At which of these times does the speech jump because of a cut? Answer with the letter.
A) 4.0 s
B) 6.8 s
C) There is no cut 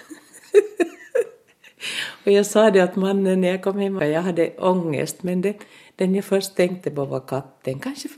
A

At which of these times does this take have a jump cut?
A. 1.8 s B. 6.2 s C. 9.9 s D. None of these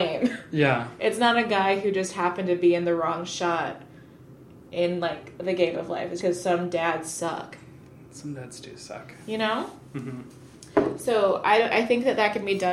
B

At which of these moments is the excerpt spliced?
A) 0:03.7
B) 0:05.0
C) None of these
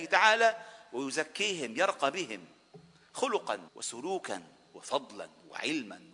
A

